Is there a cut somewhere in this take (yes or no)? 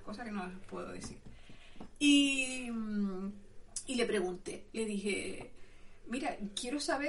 no